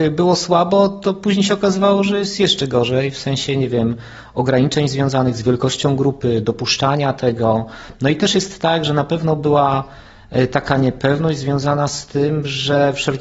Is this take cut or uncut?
uncut